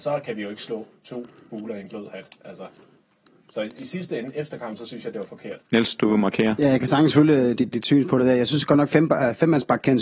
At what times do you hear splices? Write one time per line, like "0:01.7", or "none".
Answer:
0:05.6
0:07.7

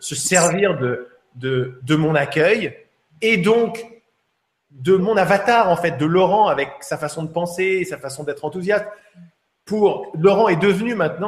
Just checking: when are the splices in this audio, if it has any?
0:05.0

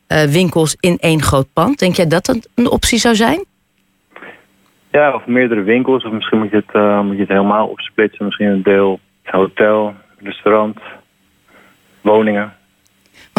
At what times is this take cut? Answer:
0:09.2

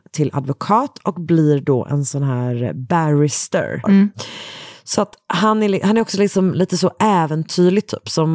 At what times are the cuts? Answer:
0:03.8

